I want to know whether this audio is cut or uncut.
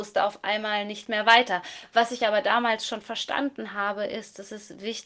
uncut